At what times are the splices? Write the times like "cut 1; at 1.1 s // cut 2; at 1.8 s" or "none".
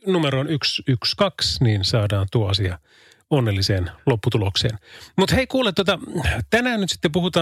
none